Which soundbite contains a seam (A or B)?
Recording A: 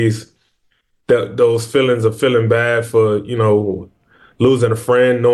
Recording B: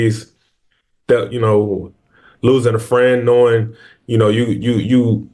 B